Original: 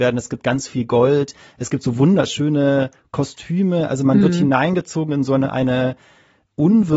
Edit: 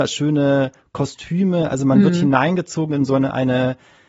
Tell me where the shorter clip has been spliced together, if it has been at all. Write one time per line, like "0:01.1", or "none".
none